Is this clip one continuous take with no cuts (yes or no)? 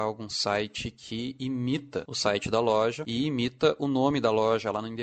yes